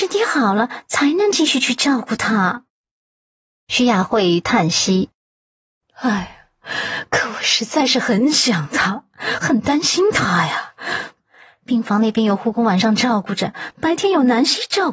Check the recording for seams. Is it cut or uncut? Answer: cut